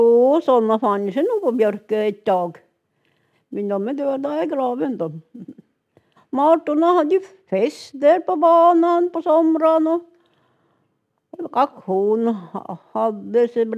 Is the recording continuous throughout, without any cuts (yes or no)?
no